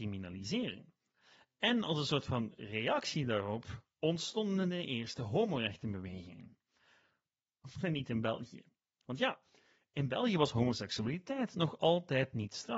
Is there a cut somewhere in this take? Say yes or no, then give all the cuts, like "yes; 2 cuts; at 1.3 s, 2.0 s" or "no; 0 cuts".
no; 0 cuts